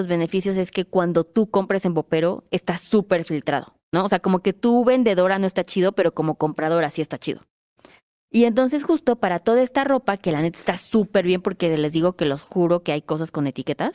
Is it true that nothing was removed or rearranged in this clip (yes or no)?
yes